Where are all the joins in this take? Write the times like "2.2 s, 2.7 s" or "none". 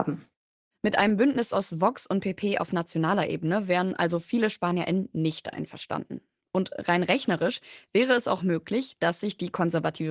none